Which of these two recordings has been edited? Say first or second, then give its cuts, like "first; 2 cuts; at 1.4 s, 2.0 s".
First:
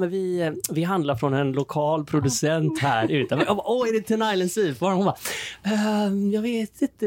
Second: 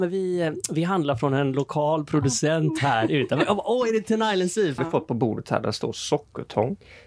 second; 1 cut; at 4.8 s